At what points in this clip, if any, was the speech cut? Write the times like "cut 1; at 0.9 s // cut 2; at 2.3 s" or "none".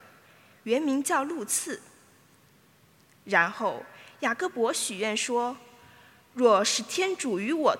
none